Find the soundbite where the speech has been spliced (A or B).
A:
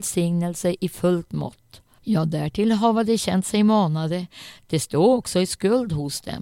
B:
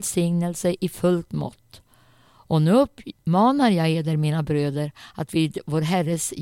A